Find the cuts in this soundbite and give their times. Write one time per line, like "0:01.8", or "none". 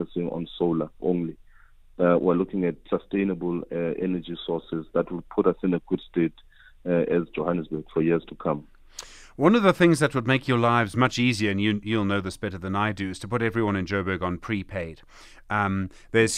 0:01.0